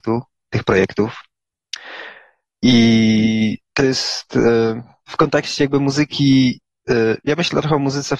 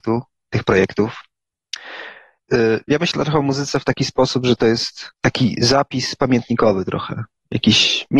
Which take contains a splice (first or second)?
second